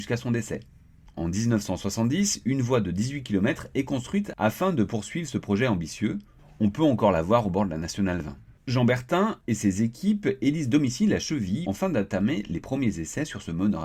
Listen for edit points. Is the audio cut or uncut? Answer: cut